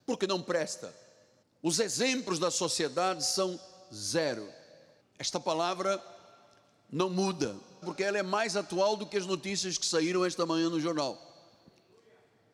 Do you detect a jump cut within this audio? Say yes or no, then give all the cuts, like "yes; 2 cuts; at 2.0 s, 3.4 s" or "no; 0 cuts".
yes; 3 cuts; at 1.4 s, 5.0 s, 7.8 s